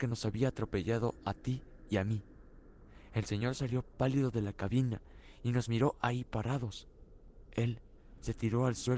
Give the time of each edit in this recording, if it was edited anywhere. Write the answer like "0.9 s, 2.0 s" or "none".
none